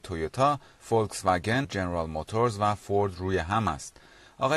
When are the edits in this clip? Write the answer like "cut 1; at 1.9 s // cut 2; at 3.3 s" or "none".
cut 1; at 1.6 s